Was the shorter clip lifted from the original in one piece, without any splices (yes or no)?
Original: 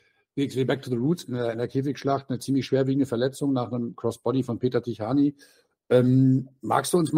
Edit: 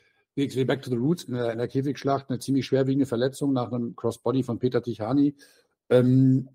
yes